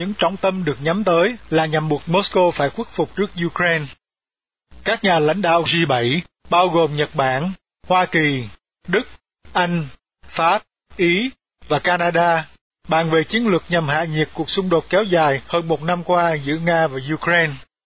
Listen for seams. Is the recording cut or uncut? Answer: cut